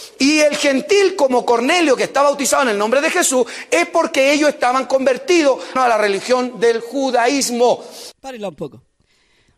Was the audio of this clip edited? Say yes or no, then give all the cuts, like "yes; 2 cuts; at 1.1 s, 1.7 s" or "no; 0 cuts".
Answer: yes; 2 cuts; at 5.8 s, 8.1 s